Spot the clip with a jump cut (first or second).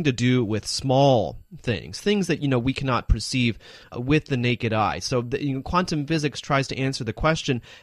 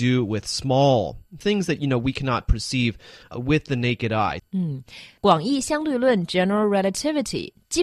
second